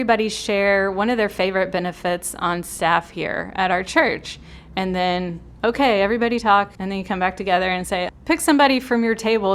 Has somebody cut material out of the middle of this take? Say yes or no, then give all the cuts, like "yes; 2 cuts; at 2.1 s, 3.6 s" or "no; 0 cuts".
yes; 2 cuts; at 6.8 s, 8.1 s